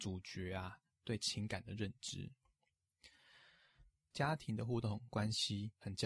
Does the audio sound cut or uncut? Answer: cut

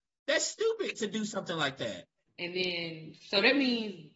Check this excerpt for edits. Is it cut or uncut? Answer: cut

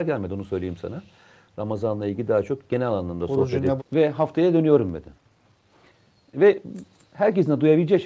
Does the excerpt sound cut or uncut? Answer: cut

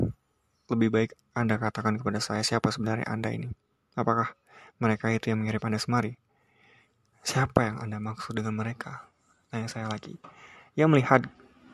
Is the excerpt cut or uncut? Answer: uncut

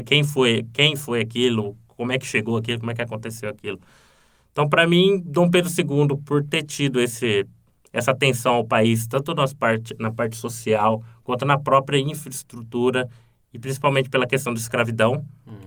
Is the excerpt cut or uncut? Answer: uncut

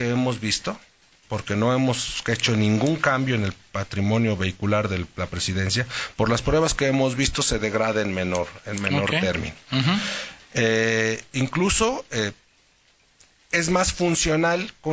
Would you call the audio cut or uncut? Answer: uncut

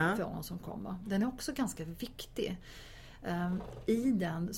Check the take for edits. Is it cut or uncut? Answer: uncut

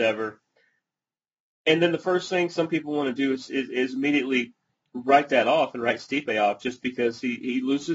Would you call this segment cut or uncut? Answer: uncut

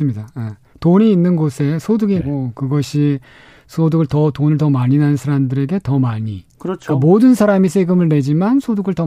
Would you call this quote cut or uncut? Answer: cut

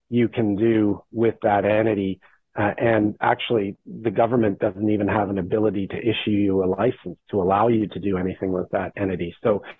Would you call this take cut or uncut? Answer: uncut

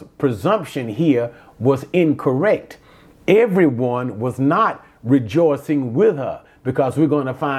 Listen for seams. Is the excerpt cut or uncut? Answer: uncut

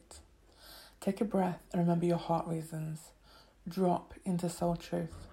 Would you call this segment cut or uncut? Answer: uncut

